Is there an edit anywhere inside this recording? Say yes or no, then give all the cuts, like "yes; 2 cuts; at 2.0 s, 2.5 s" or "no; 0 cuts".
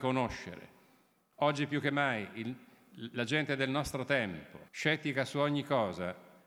yes; 2 cuts; at 1.2 s, 4.7 s